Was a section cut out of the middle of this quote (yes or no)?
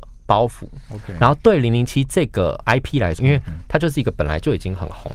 yes